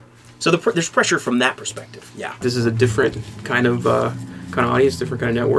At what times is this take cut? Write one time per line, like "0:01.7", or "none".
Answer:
0:02.4